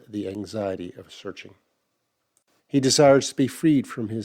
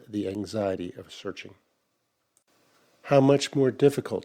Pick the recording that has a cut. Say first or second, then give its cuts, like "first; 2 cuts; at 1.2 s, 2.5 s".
first; 1 cut; at 2.6 s